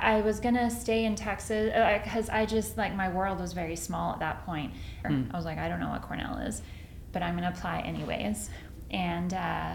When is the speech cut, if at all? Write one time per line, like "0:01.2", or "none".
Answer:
0:05.0
0:07.1

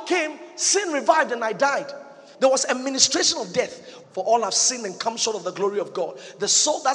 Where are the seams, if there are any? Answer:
0:02.3
0:04.0

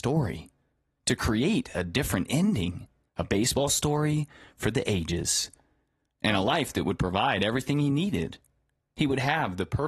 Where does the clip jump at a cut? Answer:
0:03.1

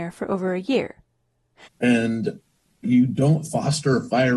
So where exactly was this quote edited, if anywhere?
0:01.7

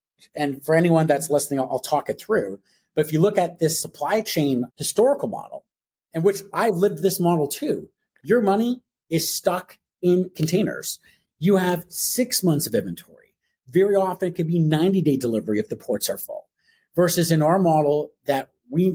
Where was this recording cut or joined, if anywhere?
0:04.7

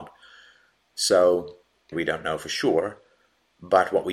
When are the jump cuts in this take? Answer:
0:01.9

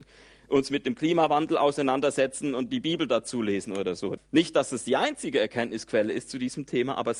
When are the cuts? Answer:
0:04.2

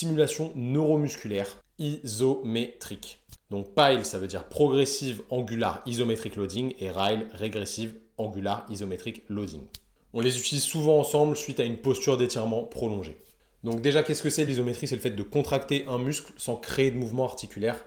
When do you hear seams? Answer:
0:14.5

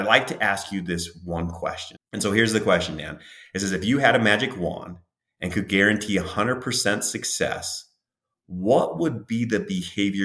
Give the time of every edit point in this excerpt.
0:02.0

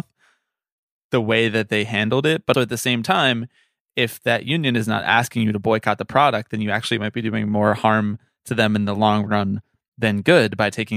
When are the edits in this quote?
0:02.5

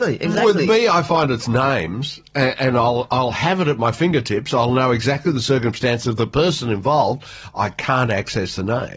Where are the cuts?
none

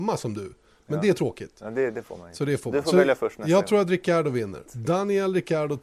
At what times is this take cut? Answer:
0:04.7

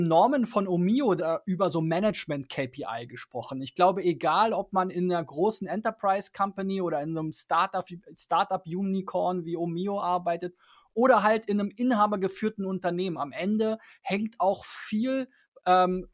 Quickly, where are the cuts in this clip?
0:01.2

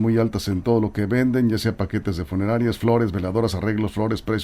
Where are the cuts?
none

